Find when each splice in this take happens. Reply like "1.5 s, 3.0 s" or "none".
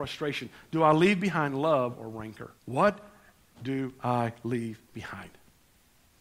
2.6 s, 4.8 s